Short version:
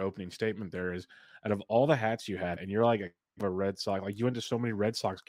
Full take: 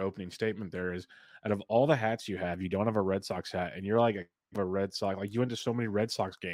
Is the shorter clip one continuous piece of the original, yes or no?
no